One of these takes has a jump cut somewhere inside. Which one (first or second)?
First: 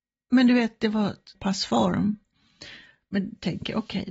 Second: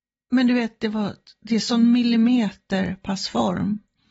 first